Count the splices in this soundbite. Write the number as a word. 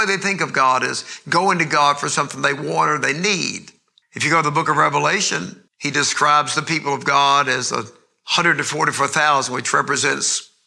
two